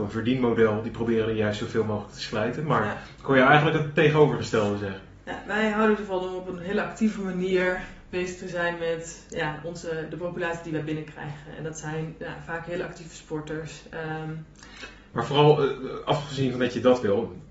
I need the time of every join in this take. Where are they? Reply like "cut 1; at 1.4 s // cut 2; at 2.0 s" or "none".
cut 1; at 15.1 s